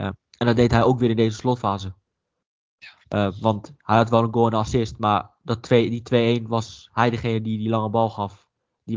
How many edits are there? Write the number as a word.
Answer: zero